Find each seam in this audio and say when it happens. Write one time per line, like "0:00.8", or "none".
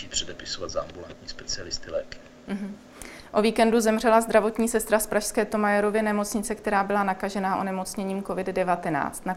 none